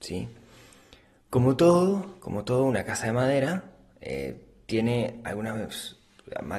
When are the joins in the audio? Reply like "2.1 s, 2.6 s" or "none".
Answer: none